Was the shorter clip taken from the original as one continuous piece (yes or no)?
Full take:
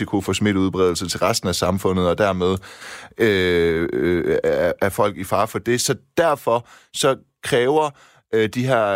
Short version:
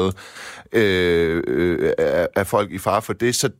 yes